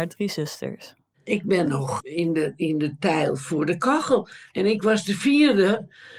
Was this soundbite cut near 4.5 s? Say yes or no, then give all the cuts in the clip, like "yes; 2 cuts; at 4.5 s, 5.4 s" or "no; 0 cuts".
no; 1 cut; at 2.0 s